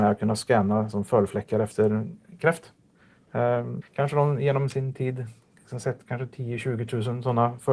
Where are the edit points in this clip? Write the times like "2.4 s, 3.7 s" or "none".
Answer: 3.8 s